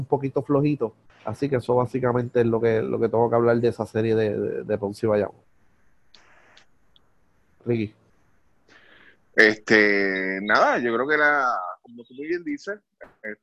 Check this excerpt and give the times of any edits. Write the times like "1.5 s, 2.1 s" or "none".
1.1 s